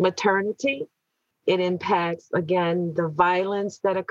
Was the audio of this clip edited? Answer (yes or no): yes